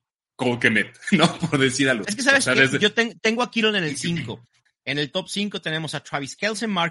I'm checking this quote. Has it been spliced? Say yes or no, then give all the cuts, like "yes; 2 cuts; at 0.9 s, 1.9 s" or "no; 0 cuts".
yes; 2 cuts; at 2.0 s, 4.7 s